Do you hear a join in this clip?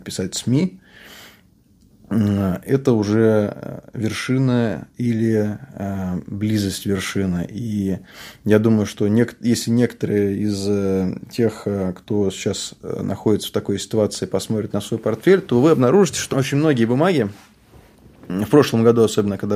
yes; 1 cut; at 16.3 s

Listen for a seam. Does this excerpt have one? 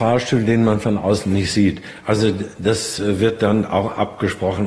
no; 0 cuts

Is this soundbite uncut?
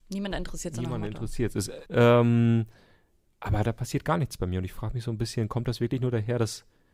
no; 1 cut; at 1.9 s

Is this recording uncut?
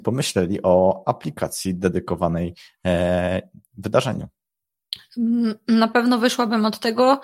yes; 0 cuts

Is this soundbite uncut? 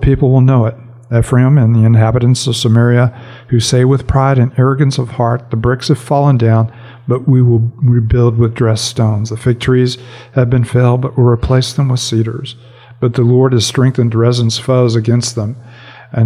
yes; 0 cuts

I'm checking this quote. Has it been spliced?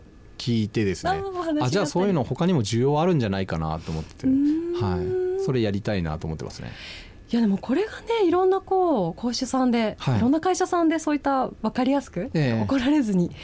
no; 0 cuts

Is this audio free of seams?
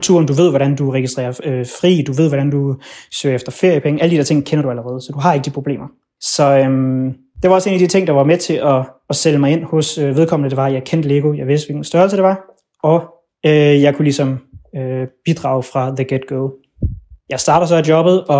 yes; 0 cuts

